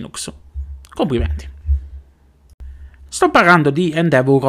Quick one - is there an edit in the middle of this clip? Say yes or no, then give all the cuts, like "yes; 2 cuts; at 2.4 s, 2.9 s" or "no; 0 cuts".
yes; 1 cut; at 3.1 s